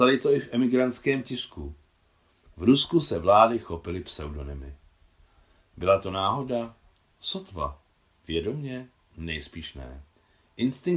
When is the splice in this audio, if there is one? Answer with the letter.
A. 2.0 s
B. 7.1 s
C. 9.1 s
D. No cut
D